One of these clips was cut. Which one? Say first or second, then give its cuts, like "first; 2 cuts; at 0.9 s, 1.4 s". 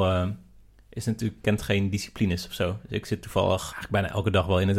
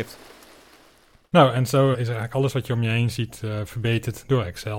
second; 1 cut; at 1.9 s